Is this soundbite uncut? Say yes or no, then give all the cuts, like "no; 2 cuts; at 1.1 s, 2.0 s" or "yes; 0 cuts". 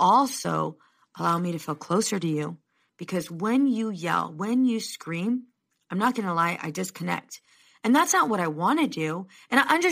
yes; 0 cuts